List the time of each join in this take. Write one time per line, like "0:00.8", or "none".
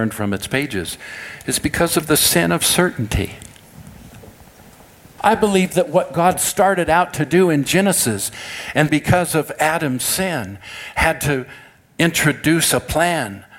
0:05.2
0:08.9